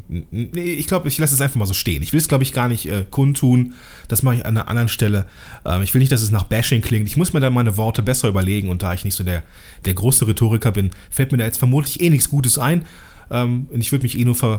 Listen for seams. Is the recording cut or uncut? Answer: uncut